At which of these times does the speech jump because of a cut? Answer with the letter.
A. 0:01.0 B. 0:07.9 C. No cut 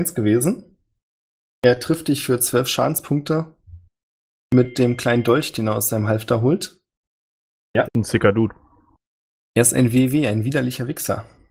B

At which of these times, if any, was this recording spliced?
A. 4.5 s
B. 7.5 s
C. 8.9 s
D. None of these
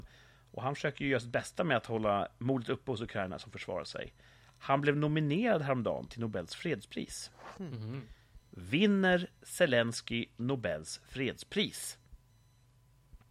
D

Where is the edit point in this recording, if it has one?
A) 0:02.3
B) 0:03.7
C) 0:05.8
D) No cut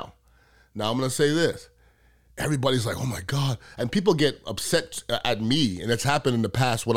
D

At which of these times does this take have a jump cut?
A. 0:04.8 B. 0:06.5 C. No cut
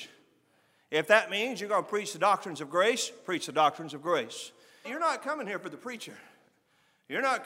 A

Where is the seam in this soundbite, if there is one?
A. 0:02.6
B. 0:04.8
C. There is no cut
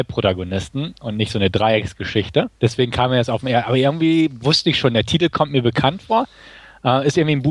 A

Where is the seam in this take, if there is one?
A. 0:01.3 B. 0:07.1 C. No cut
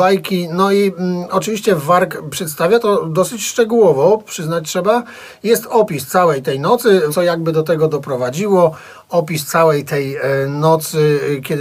B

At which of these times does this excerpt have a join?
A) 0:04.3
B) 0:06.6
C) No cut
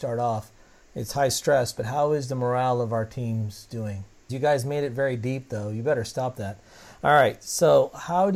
A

